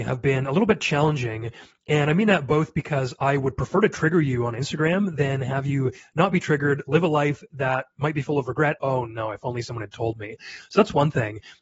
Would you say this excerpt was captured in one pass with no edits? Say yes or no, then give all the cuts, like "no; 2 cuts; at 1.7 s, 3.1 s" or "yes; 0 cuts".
no; 1 cut; at 8.8 s